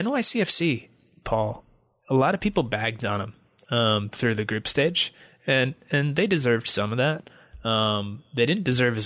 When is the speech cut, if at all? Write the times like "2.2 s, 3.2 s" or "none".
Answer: none